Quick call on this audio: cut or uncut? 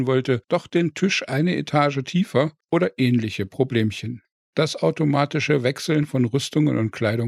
cut